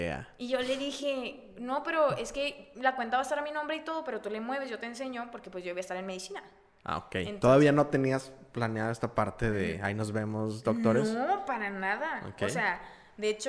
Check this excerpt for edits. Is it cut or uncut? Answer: uncut